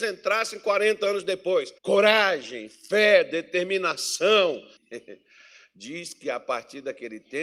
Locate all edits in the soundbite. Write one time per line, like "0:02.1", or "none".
0:01.8
0:04.8